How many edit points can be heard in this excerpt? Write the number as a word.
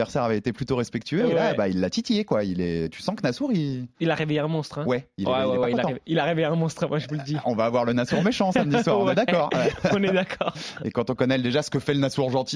zero